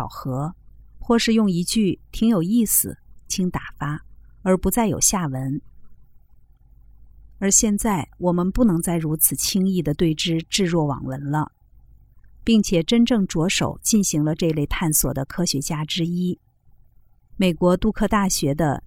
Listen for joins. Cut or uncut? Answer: cut